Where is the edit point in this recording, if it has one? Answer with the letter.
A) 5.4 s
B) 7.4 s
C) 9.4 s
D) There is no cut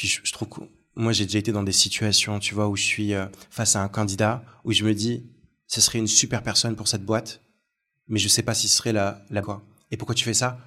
C